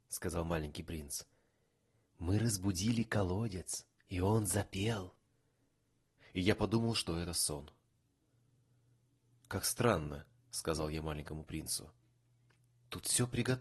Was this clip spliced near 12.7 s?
no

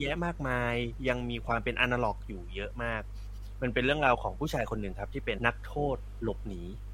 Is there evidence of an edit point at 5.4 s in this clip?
yes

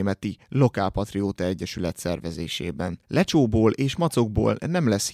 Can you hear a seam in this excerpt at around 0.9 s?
no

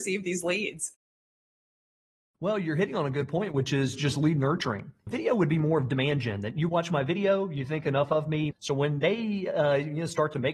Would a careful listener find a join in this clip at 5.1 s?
yes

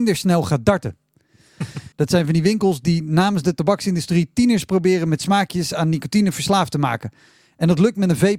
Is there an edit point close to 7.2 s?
no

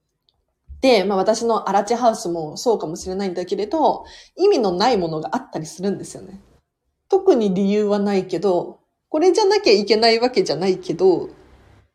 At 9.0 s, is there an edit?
yes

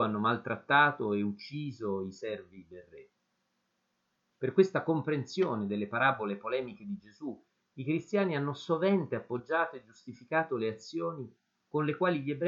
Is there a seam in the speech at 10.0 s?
no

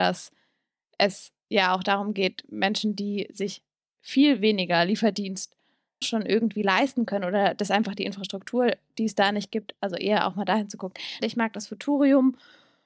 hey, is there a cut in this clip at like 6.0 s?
yes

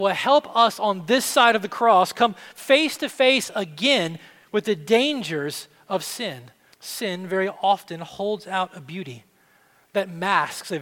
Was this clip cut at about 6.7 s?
yes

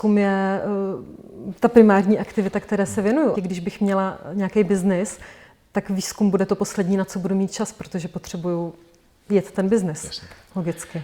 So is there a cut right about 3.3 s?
yes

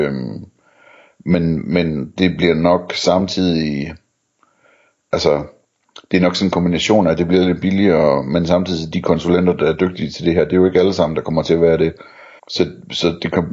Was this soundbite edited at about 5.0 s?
no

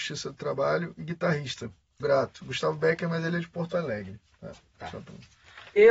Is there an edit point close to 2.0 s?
yes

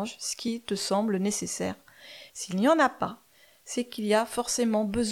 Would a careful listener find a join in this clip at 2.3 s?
yes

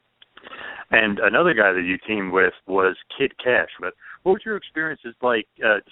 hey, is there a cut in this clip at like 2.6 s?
yes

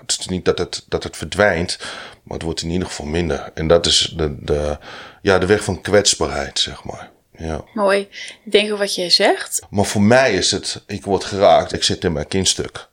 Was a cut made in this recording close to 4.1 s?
no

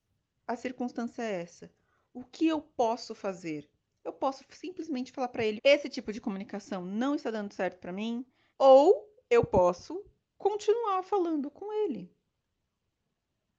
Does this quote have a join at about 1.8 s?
no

